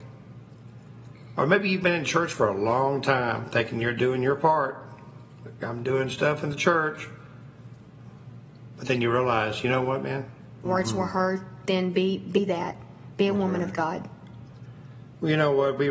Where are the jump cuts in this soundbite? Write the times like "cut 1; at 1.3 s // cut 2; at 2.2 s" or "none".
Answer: cut 1; at 10.7 s